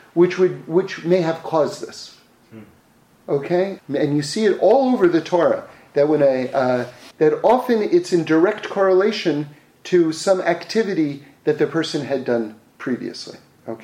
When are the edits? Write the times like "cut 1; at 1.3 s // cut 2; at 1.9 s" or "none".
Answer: cut 1; at 3.8 s // cut 2; at 7.1 s